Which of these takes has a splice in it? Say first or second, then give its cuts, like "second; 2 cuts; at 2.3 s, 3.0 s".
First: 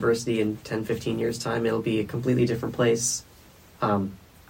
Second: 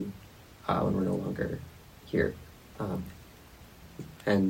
second; 1 cut; at 2.7 s